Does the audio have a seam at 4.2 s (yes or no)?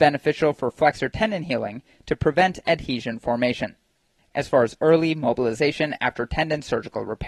yes